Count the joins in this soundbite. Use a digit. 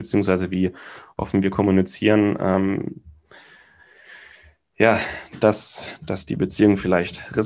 0